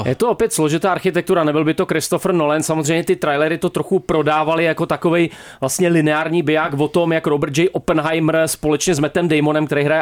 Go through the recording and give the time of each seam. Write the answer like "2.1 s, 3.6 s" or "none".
none